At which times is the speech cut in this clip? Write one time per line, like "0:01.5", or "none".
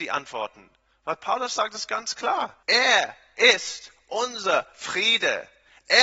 0:02.6